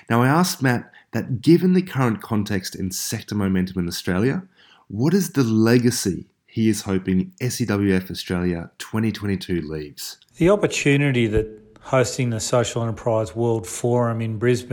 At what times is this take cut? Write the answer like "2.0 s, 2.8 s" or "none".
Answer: 10.3 s

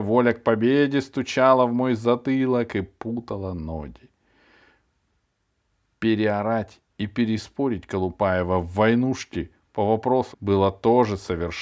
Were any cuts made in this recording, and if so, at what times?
10.3 s

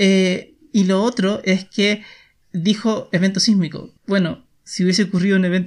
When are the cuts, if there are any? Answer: 2.4 s, 4.0 s

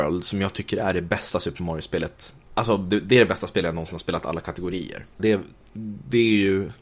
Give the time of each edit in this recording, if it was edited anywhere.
2.4 s, 5.2 s

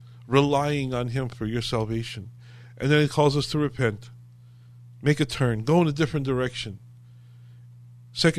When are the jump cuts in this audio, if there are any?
none

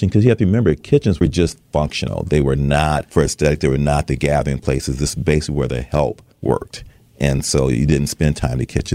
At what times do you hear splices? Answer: 6.3 s

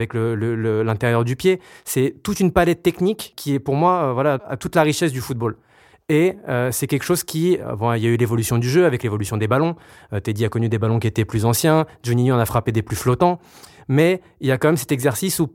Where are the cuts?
none

